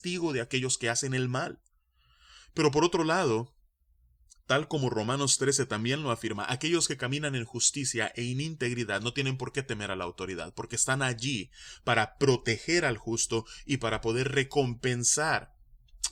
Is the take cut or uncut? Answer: uncut